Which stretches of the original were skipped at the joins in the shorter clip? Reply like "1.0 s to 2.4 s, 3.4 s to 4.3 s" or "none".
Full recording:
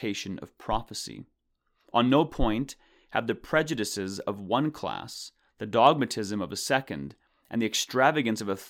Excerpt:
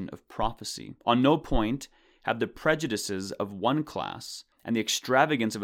1.3 s to 1.9 s, 5.4 s to 7.4 s